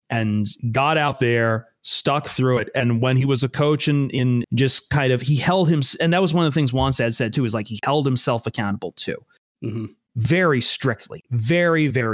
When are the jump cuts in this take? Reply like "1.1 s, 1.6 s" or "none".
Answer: 4.4 s

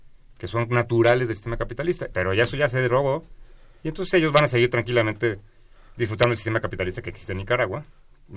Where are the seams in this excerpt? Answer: 2.1 s

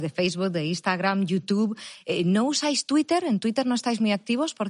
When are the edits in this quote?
none

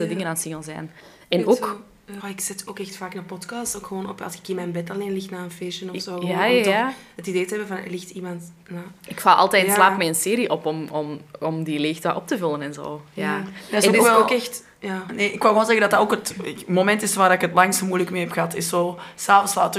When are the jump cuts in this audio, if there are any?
2.2 s

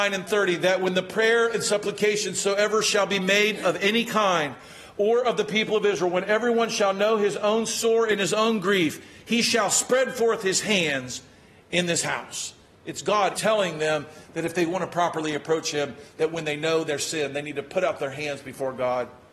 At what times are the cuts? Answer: 13.3 s

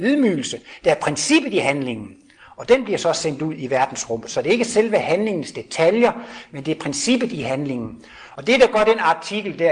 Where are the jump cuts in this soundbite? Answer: none

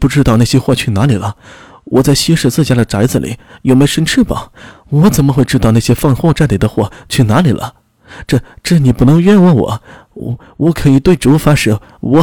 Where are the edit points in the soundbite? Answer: none

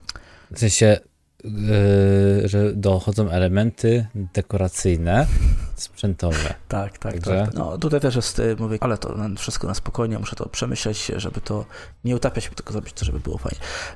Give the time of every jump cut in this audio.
7.5 s, 8.8 s, 12.5 s

